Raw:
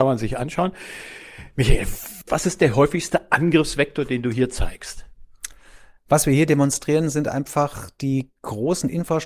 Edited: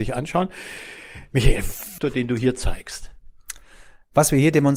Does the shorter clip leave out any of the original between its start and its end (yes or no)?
yes